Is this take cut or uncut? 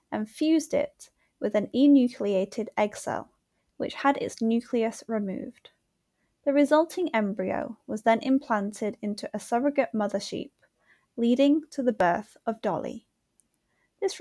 uncut